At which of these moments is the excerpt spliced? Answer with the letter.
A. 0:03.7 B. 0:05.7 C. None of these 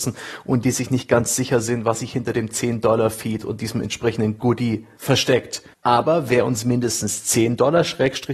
B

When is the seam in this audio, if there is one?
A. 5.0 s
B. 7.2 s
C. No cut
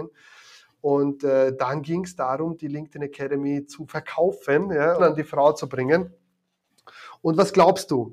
A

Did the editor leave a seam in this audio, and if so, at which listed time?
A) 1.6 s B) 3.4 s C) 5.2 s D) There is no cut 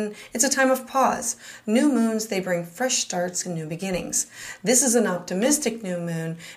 B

